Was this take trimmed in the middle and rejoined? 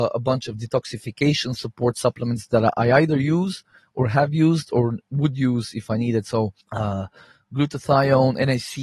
yes; 1 cut; at 6.6 s

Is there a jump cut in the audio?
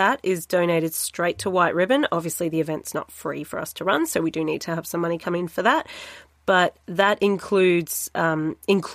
no; 0 cuts

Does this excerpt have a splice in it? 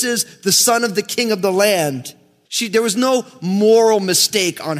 yes; 1 cut; at 2.5 s

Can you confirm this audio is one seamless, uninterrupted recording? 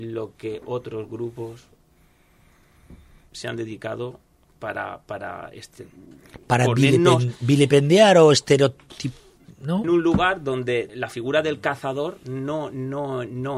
no; 2 cuts; at 9.8 s, 10.9 s

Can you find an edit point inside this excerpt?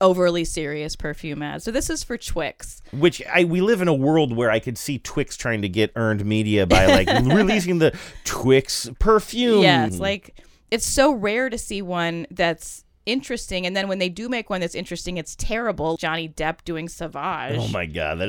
yes; 2 cuts; at 9.9 s, 16.0 s

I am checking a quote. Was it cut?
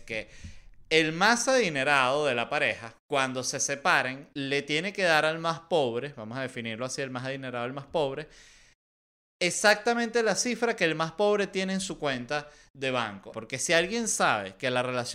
yes; 2 cuts; at 3.0 s, 13.3 s

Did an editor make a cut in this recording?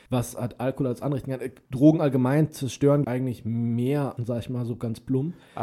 yes; 2 cuts; at 3.0 s, 4.2 s

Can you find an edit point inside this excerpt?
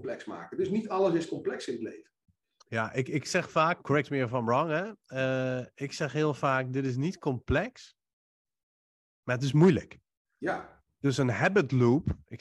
yes; 1 cut; at 3.8 s

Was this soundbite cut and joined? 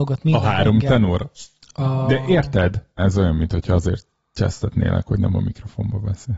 yes; 2 cuts; at 1.6 s, 3.0 s

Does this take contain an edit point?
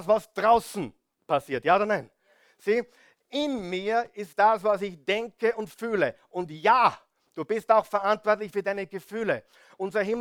no; 0 cuts

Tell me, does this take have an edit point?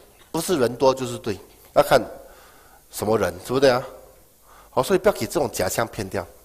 no; 0 cuts

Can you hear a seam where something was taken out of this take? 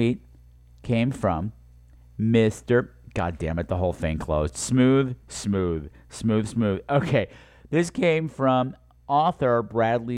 yes; 1 cut; at 5.2 s

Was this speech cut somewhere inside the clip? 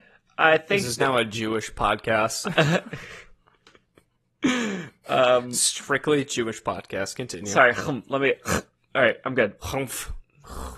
no; 0 cuts

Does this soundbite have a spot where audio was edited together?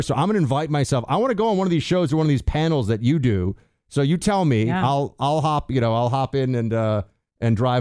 no; 0 cuts

